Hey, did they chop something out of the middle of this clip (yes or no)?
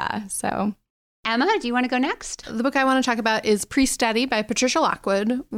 yes